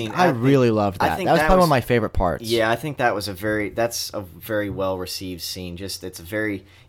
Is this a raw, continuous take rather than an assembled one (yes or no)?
yes